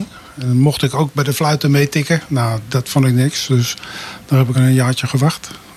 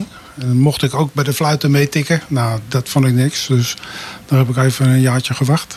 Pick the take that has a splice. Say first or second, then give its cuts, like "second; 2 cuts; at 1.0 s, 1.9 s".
first; 1 cut; at 4.5 s